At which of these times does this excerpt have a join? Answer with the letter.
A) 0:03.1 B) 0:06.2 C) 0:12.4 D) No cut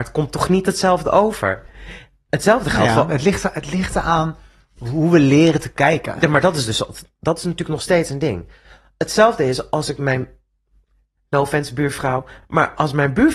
D